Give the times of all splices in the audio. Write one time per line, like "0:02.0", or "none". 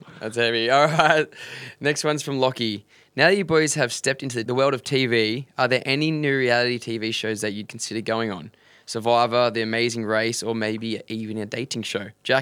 none